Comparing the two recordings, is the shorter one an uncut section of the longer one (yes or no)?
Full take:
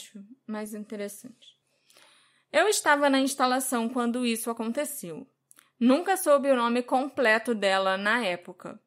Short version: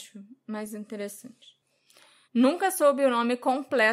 no